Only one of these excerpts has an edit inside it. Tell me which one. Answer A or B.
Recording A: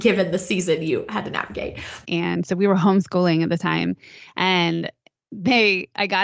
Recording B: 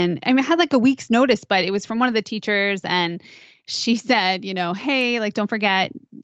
A